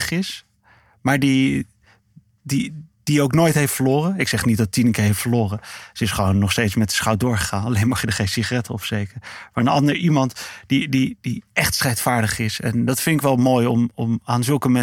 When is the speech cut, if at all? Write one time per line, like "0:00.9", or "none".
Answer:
none